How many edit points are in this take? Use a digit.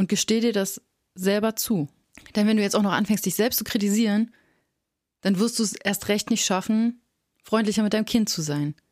0